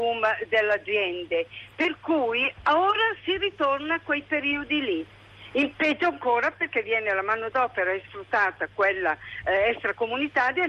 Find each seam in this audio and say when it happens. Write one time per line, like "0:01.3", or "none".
none